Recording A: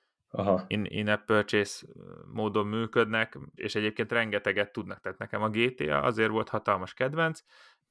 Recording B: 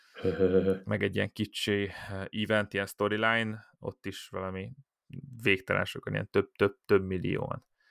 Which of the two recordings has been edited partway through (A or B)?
A